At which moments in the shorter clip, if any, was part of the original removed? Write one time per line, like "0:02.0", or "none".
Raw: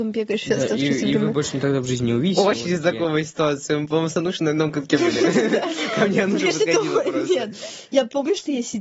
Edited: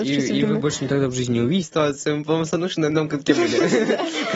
0:01.6

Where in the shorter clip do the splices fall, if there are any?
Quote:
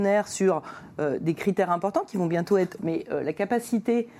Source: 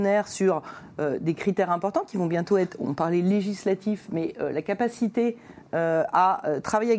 0:02.8

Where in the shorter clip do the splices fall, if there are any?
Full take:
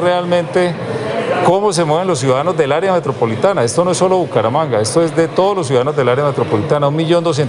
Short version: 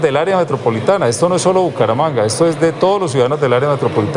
none

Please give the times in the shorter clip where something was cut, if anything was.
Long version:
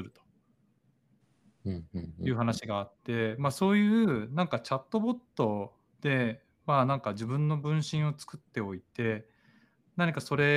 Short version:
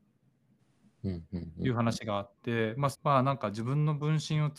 0:02.9

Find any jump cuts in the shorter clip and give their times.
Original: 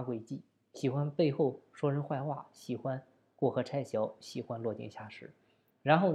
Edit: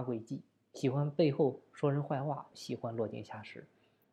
0:02.5

